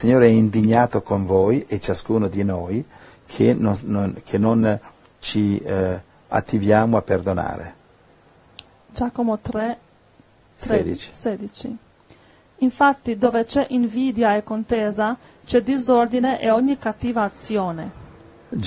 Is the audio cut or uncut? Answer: uncut